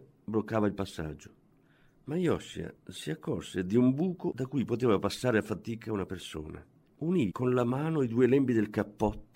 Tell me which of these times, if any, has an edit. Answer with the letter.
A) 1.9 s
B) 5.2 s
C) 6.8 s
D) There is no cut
C